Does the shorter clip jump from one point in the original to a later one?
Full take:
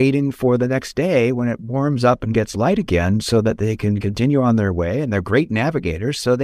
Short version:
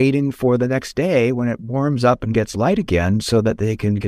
no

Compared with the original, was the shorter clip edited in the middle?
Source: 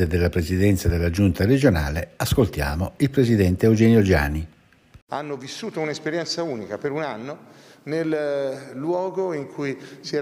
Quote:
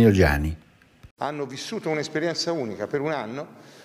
no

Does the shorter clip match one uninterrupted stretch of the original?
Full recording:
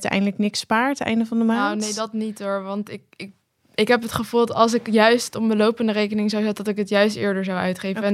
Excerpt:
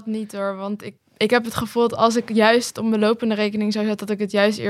no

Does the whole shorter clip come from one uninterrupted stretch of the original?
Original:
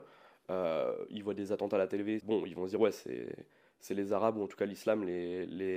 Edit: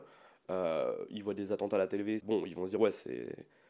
yes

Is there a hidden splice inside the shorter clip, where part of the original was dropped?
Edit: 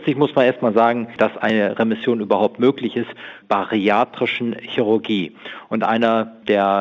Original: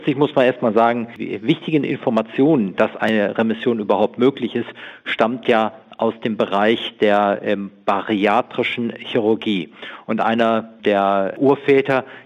yes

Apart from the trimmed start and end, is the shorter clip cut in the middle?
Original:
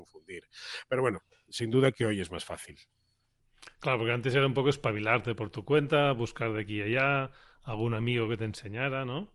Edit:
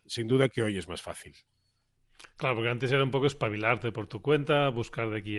no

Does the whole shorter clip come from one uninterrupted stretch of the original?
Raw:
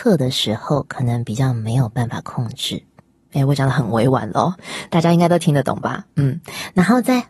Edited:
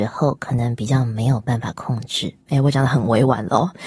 no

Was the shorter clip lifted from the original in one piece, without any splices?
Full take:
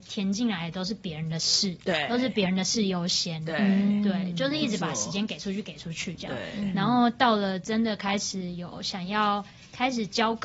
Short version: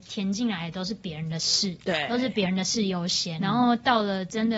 no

